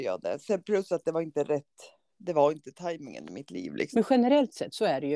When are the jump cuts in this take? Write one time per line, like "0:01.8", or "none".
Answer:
0:03.9